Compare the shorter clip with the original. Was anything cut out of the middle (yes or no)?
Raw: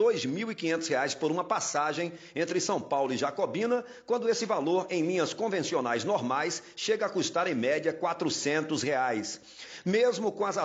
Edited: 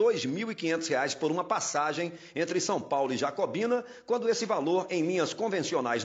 no